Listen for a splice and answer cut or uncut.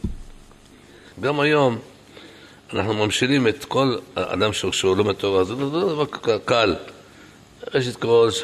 cut